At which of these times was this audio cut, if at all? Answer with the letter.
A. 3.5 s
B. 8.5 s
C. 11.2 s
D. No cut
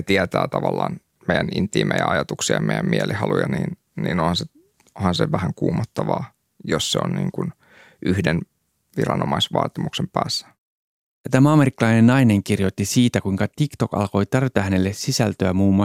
D